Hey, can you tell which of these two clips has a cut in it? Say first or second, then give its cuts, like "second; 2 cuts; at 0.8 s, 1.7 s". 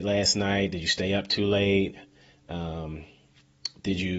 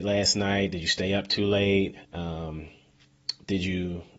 second; 1 cut; at 2.0 s